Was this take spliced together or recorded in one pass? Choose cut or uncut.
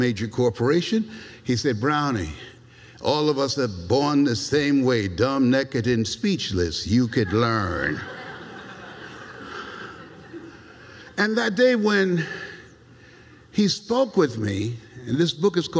uncut